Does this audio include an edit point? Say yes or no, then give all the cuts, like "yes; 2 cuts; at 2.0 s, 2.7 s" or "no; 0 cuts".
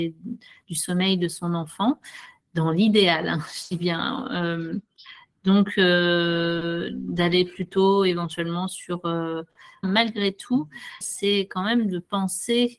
yes; 2 cuts; at 9.8 s, 11.0 s